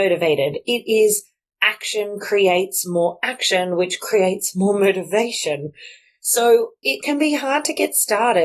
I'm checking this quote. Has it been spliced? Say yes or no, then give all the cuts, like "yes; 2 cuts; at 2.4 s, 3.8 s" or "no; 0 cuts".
no; 0 cuts